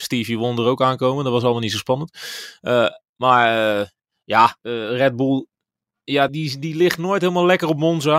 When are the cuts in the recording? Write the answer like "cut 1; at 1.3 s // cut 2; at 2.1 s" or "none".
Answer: cut 1; at 4.6 s // cut 2; at 6.3 s